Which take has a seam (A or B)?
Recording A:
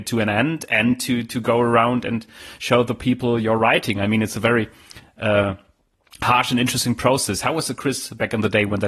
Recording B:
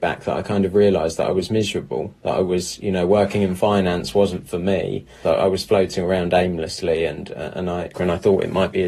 B